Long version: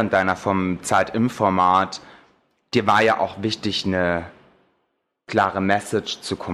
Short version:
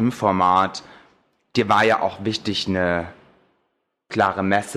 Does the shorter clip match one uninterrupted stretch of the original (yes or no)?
yes